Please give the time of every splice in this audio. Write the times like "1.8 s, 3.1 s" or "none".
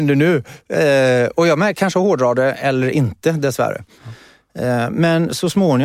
4.0 s